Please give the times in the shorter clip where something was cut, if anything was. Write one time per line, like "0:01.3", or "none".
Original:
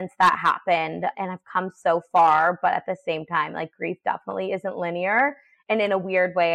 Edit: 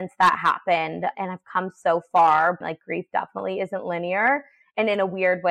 0:02.6